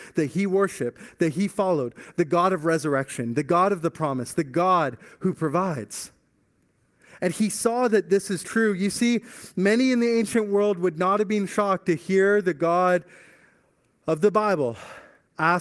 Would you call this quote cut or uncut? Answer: uncut